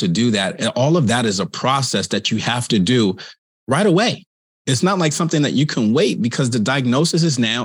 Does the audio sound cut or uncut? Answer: uncut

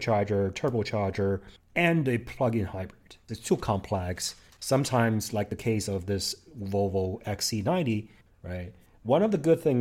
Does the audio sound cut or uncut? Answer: cut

